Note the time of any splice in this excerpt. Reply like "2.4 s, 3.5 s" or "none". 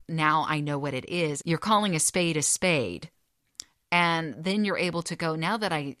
1.4 s